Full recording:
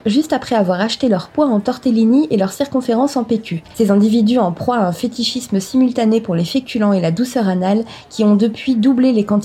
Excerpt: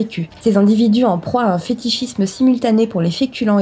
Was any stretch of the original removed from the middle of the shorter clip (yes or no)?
no